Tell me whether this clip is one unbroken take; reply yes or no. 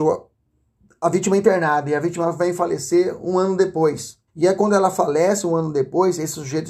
no